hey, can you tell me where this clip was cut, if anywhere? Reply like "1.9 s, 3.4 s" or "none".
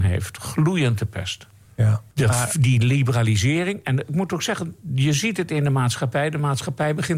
2.1 s